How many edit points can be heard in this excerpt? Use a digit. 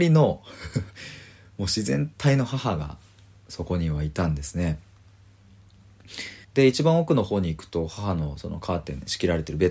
1